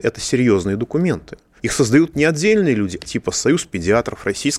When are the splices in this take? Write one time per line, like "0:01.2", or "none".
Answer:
0:01.6
0:03.0